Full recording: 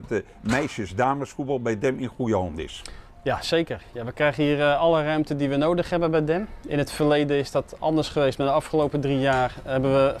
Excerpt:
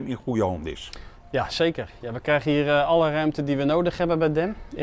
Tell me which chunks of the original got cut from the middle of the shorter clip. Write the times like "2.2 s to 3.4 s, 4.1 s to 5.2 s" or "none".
none